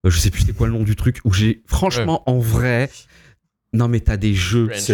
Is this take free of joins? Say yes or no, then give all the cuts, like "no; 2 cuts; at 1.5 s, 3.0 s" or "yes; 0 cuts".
yes; 0 cuts